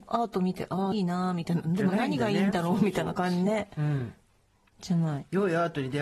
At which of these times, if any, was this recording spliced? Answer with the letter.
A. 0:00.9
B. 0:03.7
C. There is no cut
A